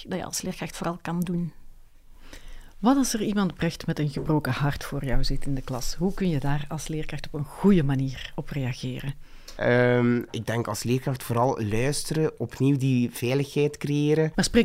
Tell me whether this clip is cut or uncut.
uncut